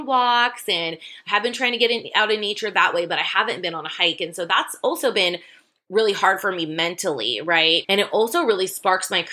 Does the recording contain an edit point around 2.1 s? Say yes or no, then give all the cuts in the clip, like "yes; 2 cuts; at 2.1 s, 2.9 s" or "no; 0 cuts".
no; 1 cut; at 7.8 s